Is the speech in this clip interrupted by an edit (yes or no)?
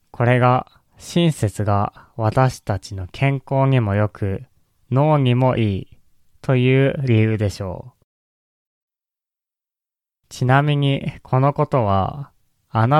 no